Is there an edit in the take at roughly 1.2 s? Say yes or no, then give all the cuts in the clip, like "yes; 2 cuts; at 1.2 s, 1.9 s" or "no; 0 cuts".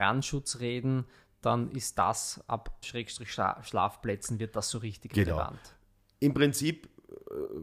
no; 1 cut; at 2.8 s